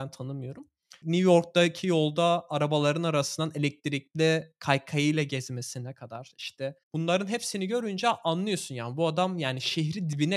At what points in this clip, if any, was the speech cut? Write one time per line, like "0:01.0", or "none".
0:01.0
0:06.8